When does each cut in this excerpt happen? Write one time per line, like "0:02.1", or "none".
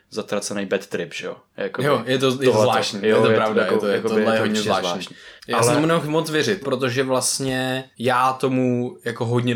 0:05.4
0:06.6
0:07.9